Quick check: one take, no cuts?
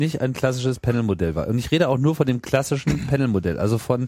yes; 0 cuts

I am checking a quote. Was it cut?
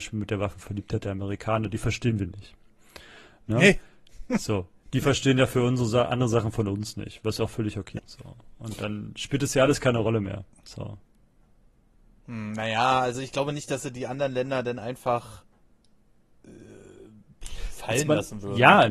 yes; 1 cut; at 8.0 s

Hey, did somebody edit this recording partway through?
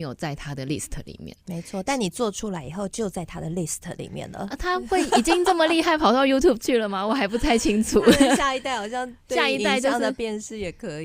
no; 0 cuts

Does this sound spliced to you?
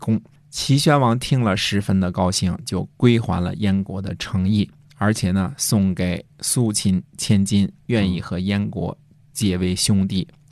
no; 0 cuts

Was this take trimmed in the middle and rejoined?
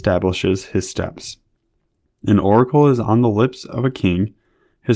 no; 0 cuts

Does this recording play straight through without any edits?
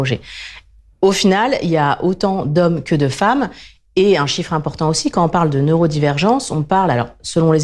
yes; 0 cuts

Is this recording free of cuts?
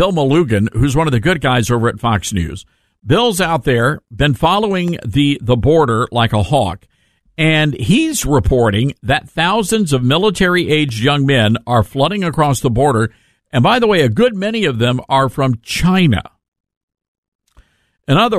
yes; 0 cuts

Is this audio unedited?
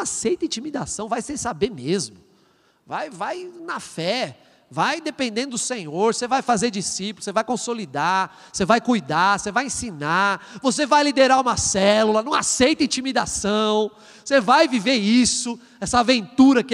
yes; 0 cuts

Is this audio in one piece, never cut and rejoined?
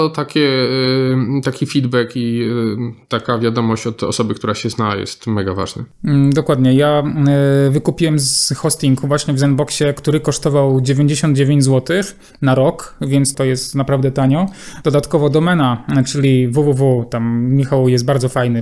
no; 1 cut; at 13.3 s

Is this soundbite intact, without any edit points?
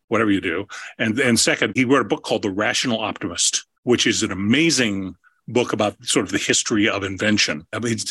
no; 2 cuts; at 1.8 s, 3.7 s

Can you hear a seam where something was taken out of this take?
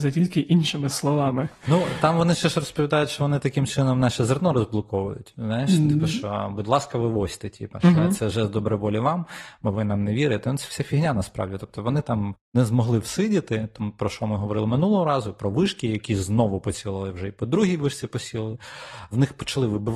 no; 0 cuts

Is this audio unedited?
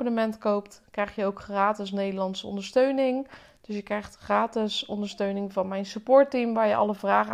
yes; 0 cuts

